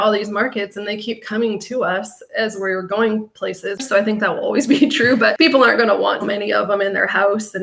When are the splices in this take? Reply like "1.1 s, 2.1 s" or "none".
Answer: 3.8 s, 6.2 s